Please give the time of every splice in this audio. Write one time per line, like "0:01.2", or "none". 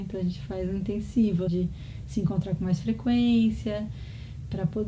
0:01.5